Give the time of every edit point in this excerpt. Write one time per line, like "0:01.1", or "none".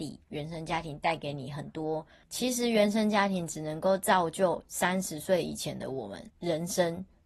0:02.2
0:06.3